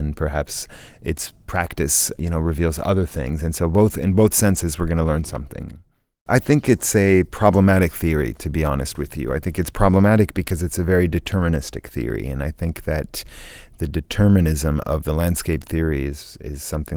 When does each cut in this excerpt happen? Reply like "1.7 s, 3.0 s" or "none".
none